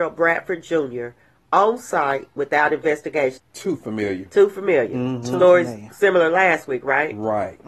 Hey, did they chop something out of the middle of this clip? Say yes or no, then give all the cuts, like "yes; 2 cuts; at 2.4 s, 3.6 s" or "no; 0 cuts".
yes; 1 cut; at 3.4 s